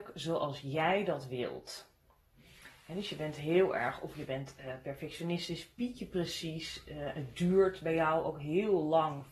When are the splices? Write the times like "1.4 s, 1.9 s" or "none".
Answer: none